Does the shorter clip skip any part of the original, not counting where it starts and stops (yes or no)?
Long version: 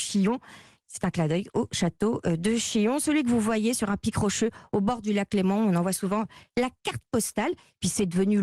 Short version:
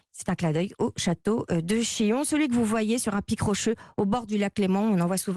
no